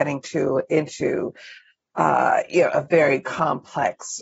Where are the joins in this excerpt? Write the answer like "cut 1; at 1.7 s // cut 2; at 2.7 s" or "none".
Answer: none